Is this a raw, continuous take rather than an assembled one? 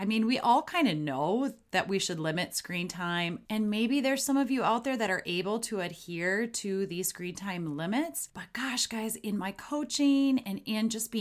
yes; 0 cuts

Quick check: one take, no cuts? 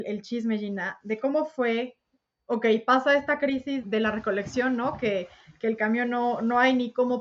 no; 1 cut; at 3.8 s

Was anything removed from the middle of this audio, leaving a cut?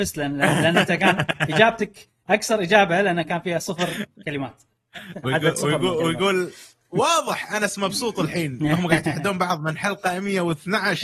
no; 0 cuts

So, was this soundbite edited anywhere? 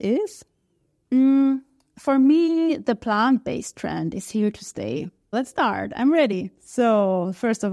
yes; 2 cuts; at 1.0 s, 5.3 s

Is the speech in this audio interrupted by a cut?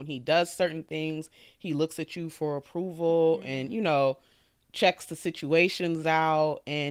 no; 0 cuts

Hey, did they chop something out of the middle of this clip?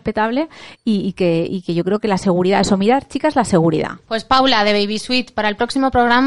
yes; 1 cut; at 4.0 s

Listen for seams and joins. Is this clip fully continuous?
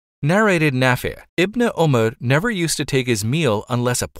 no; 1 cut; at 1.3 s

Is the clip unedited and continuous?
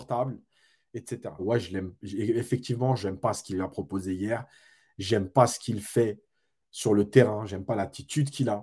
no; 1 cut; at 1.4 s

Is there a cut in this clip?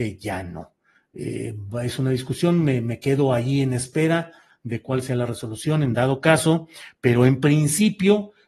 no; 0 cuts

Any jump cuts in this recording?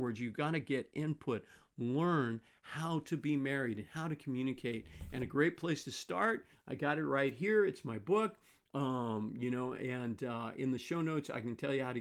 no; 0 cuts

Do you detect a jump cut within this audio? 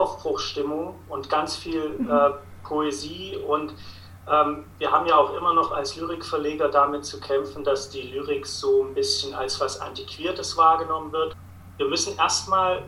no; 0 cuts

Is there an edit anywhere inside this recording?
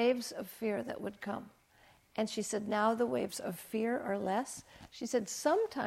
no; 0 cuts

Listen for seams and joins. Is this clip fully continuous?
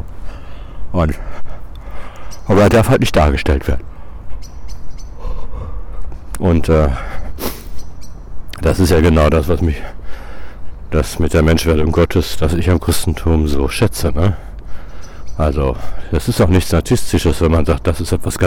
yes; 0 cuts

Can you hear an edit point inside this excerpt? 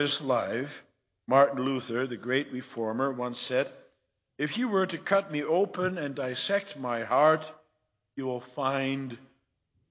no; 0 cuts

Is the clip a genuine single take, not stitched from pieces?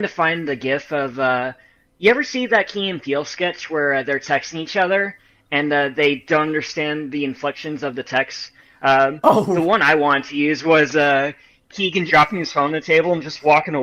no; 1 cut; at 12.1 s

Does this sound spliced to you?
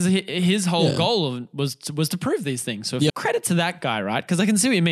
yes; 1 cut; at 3.1 s

